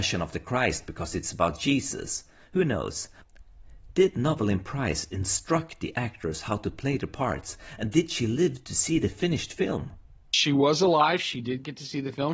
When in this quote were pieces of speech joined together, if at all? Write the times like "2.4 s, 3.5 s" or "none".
none